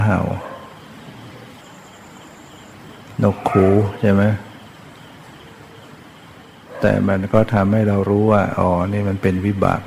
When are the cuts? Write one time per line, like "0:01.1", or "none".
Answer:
none